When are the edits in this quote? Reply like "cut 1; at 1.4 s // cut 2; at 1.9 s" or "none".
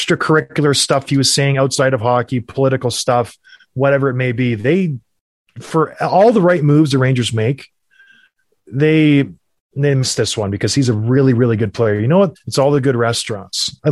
cut 1; at 12.3 s